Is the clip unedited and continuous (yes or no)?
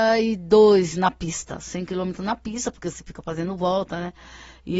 yes